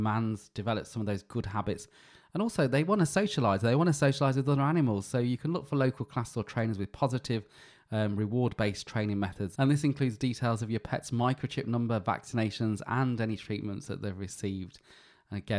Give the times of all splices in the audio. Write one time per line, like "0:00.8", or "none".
0:09.5